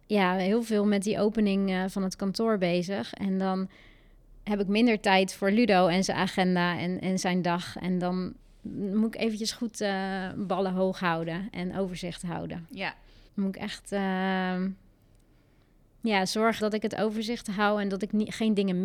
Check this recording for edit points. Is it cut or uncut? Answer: cut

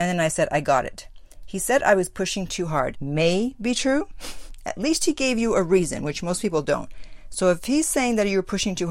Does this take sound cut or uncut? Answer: cut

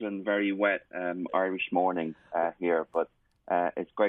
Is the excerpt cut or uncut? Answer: uncut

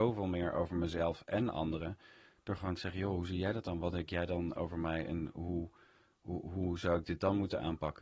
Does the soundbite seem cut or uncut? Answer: uncut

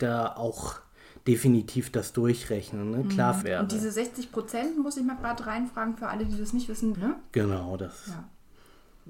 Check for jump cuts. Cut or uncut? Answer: cut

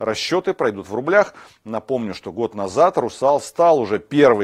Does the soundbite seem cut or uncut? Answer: uncut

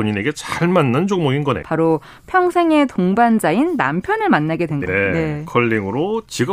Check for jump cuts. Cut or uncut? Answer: cut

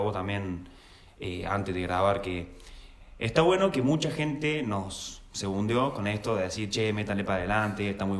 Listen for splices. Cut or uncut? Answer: uncut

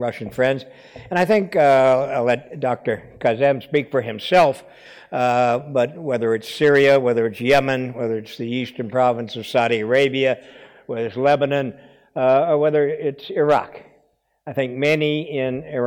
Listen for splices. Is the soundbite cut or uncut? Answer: uncut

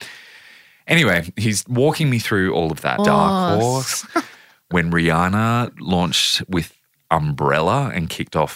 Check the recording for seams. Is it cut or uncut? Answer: cut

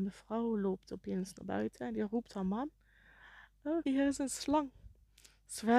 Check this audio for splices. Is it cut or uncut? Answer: cut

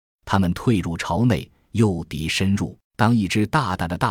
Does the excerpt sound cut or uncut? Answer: cut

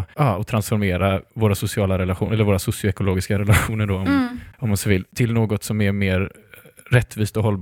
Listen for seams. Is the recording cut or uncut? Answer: uncut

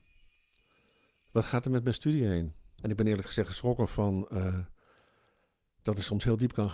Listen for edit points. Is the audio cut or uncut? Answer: cut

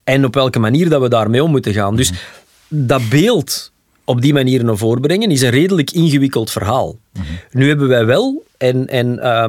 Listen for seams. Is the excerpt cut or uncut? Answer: uncut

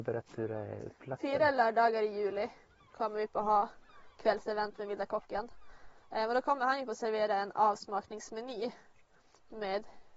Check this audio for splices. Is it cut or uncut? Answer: uncut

